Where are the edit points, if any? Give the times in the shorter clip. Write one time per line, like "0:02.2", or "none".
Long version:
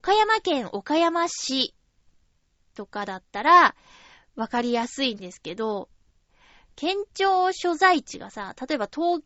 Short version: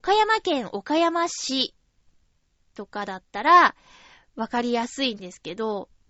none